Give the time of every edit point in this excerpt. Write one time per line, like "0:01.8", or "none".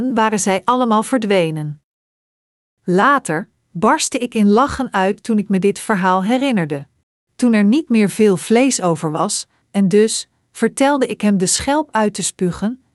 0:03.7
0:07.2
0:09.6